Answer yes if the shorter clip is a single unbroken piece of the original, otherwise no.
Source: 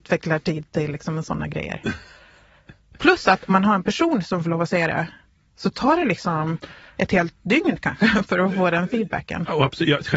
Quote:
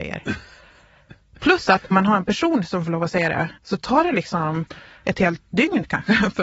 no